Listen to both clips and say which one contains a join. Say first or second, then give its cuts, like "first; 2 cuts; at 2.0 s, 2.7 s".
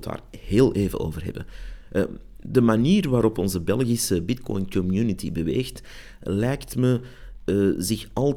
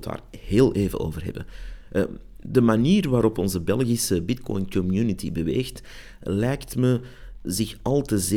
second; 1 cut; at 7.5 s